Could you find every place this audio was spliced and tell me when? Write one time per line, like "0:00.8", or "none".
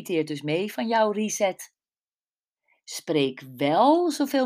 none